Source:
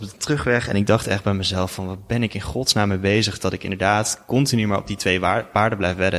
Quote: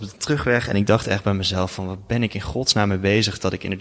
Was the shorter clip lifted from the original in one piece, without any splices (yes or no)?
yes